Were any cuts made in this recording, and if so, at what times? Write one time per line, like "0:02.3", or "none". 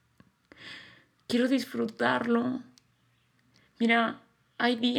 0:01.2
0:03.6